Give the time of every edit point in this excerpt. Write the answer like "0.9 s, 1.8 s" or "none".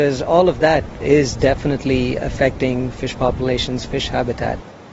2.2 s